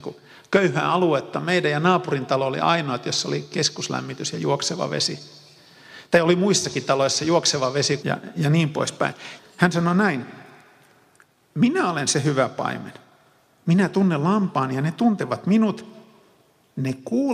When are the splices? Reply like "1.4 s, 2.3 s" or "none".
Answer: 8.0 s, 9.4 s